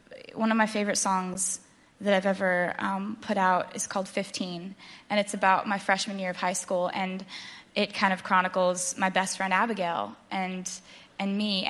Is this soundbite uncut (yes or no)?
yes